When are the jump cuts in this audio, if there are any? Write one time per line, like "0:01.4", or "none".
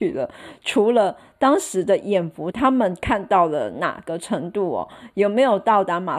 0:02.5